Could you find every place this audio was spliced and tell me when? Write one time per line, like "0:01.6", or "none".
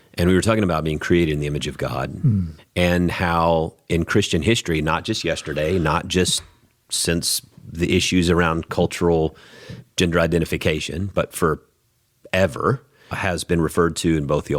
0:02.6
0:13.1